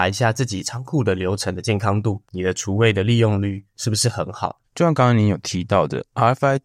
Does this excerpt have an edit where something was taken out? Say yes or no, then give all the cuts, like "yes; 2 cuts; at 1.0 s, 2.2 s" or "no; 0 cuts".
yes; 1 cut; at 4.6 s